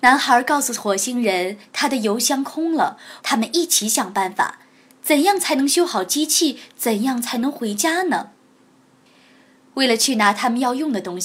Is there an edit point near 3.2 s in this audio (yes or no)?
yes